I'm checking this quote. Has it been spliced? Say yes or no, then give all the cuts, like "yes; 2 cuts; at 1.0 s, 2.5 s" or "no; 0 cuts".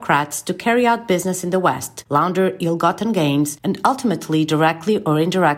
no; 0 cuts